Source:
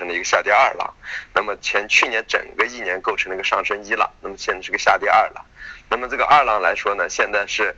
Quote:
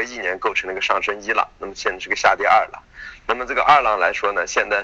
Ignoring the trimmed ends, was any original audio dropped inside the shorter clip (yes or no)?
no